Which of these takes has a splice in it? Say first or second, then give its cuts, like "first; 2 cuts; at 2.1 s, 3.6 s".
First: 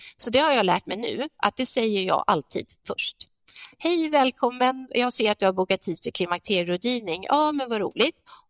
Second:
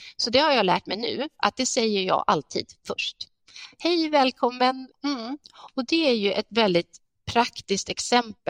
second; 1 cut; at 4.9 s